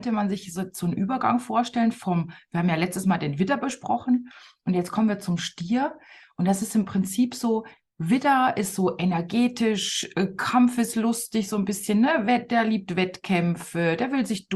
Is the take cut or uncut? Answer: uncut